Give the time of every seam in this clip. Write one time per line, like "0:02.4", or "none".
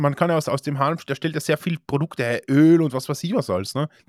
none